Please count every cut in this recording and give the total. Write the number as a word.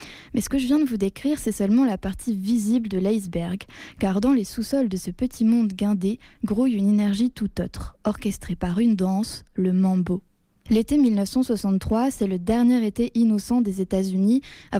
one